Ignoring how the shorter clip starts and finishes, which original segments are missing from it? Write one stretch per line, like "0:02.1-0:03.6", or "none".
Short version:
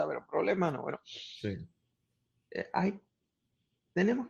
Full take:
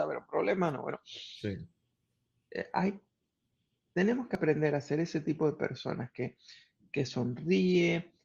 none